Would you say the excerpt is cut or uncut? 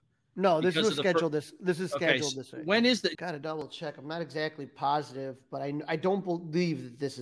cut